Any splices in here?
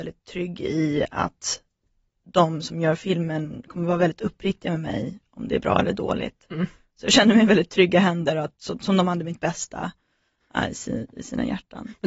no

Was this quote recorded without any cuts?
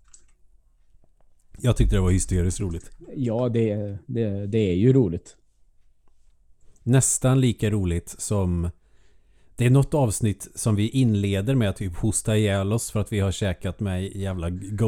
yes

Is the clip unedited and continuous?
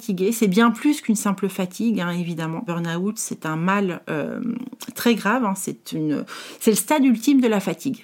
no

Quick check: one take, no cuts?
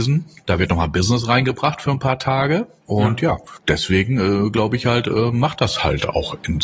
yes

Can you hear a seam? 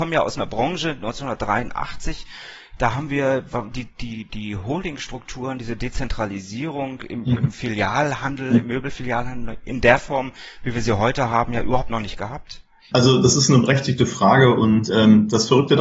yes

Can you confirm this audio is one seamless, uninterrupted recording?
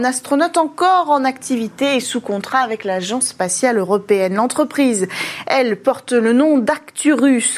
yes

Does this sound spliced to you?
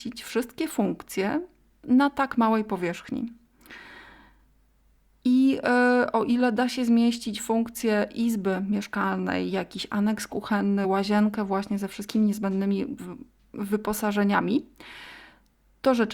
no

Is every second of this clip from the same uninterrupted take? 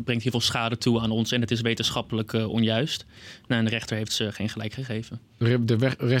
yes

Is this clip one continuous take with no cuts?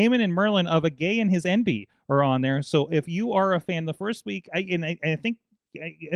yes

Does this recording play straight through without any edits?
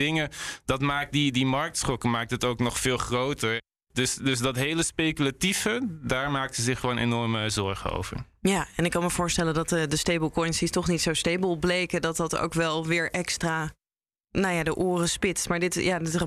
yes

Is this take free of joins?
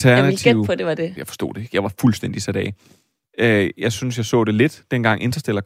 no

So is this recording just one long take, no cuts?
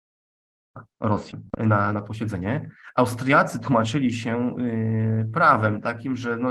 yes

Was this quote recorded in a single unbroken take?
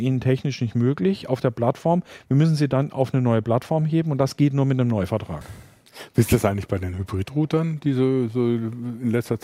yes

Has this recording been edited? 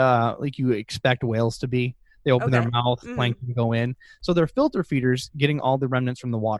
no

